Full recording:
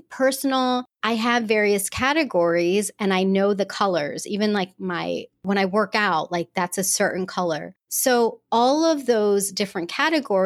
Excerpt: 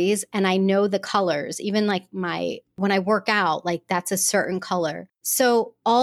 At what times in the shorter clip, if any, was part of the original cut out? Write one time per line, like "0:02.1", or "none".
none

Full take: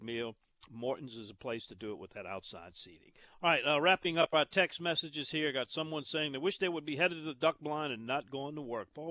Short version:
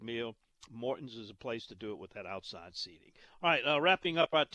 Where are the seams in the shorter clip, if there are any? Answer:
none

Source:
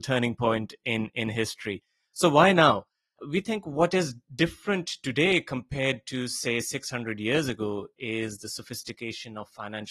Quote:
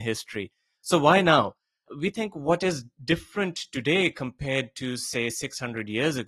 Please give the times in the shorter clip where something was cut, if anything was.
none

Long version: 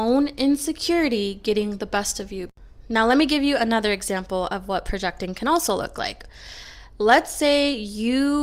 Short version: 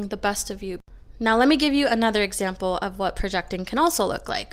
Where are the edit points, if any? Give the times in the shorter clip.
none

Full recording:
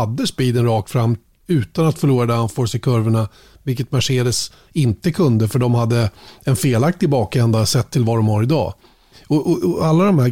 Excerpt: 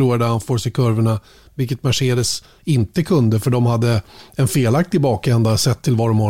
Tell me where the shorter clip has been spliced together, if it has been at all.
none

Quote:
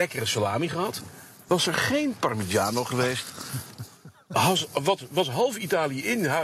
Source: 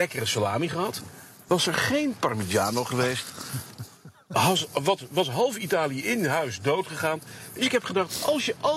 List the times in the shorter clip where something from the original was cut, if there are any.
none

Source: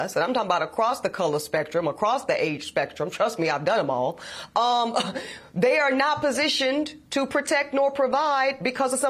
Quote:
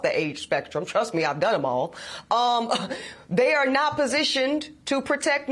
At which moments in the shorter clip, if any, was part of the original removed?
none

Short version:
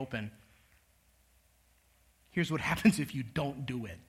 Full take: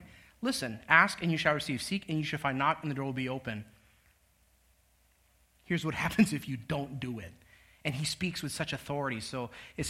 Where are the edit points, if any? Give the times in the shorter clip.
none

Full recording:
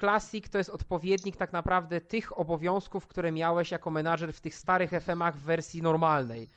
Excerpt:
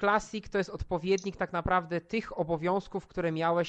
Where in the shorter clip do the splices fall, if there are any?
none

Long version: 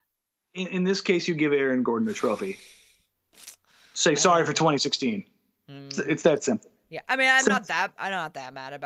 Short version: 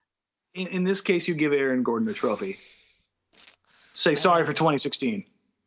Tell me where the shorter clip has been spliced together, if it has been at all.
none

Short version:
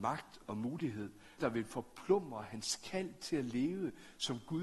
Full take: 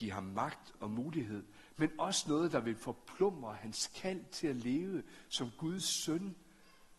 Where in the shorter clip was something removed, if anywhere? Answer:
0:01.4

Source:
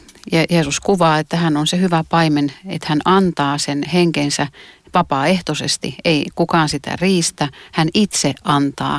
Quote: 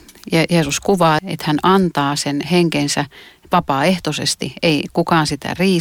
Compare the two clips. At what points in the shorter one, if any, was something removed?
0:01.2

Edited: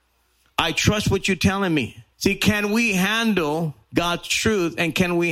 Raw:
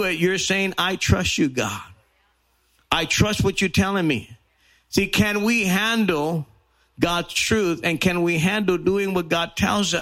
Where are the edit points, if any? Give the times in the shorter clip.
0:02.1
0:03.8

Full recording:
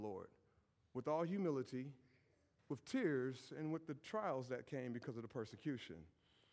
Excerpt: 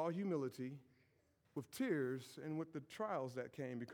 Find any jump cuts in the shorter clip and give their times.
none

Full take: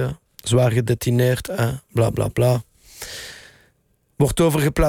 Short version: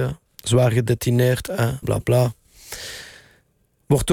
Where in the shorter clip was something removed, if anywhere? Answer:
0:01.8

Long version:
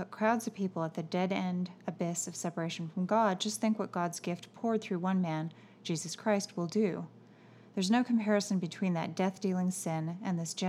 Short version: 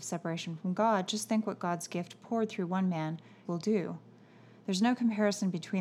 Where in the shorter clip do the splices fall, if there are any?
0:03.4

